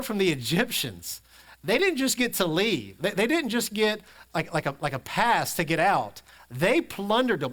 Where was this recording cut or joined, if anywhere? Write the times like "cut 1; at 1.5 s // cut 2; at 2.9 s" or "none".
none